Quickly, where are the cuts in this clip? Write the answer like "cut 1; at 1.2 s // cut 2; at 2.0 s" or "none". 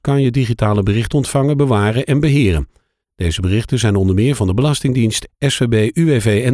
cut 1; at 5.3 s